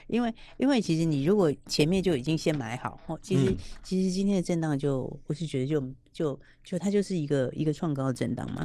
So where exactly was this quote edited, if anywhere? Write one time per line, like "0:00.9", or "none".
none